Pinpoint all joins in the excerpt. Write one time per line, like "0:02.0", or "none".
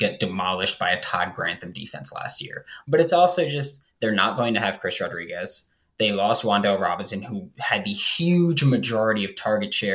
0:02.8